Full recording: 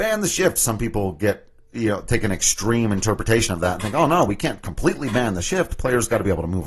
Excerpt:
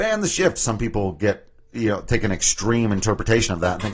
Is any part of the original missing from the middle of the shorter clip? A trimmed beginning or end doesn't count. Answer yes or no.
no